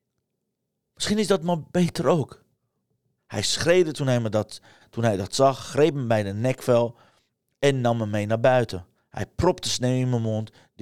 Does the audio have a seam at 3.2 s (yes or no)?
yes